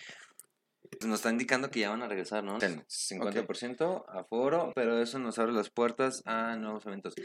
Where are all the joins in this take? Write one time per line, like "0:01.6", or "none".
0:01.0
0:02.6
0:04.7